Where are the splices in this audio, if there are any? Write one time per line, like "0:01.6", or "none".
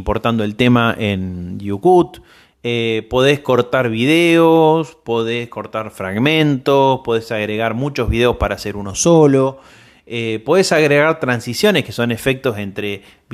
none